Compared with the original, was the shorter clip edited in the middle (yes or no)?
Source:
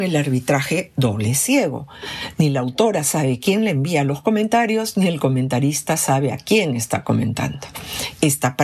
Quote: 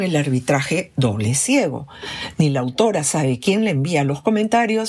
no